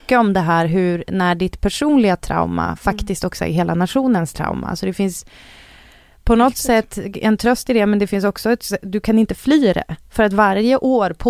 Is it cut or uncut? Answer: uncut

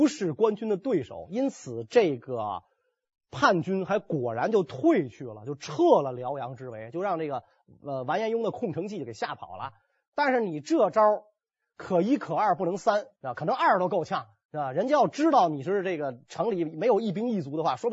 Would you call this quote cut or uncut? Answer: uncut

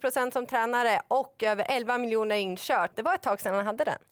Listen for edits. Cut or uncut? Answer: cut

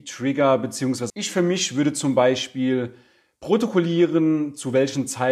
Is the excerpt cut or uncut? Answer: cut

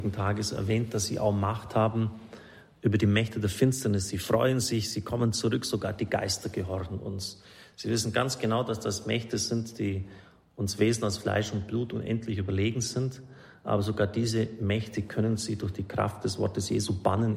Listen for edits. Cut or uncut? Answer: uncut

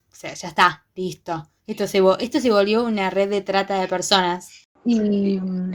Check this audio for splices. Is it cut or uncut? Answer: uncut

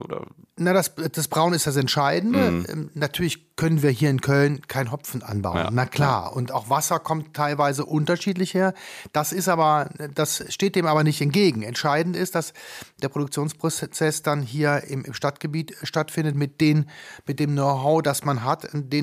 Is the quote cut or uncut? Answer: uncut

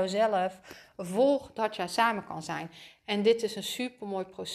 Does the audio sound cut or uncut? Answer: cut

